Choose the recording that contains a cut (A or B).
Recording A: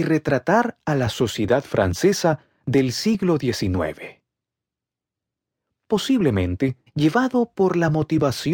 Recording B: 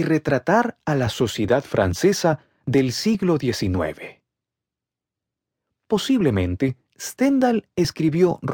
A